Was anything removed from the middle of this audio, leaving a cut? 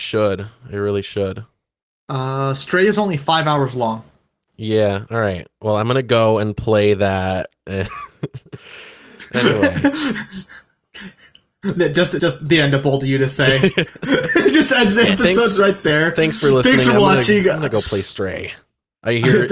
yes; 1 cut; at 12.2 s

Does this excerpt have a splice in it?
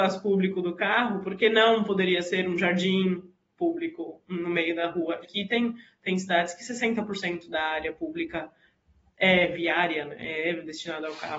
yes; 1 cut; at 5.2 s

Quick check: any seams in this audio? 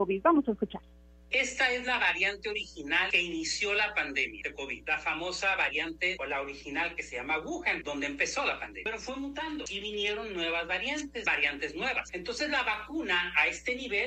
no; 0 cuts

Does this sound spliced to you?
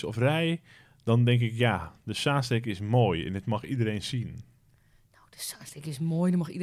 no; 0 cuts

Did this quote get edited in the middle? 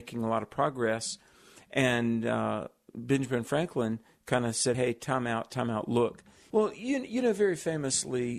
yes; 2 cuts; at 4.7 s, 6.5 s

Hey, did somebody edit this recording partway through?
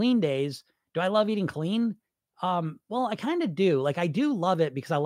no; 0 cuts

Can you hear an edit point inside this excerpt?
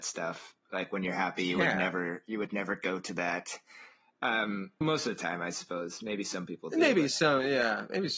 yes; 1 cut; at 4.8 s

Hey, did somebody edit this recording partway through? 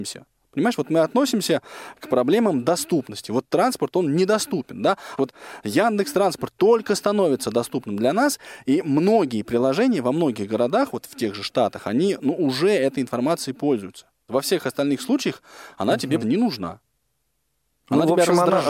yes; 3 cuts; at 5.2 s, 14.3 s, 16.2 s

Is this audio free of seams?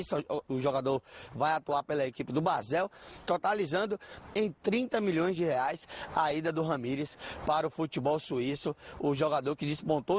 no; 1 cut; at 3.2 s

